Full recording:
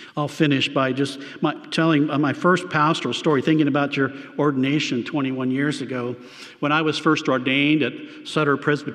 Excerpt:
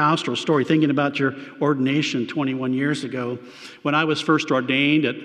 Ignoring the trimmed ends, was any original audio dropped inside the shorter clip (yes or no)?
no